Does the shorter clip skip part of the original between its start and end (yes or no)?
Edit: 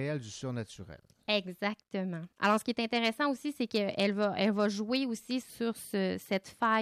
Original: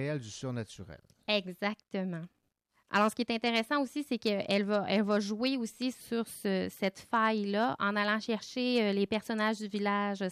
yes